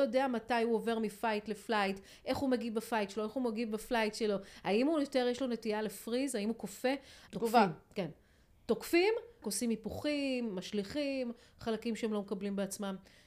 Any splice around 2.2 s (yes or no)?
no